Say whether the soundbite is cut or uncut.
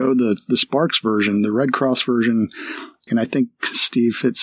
cut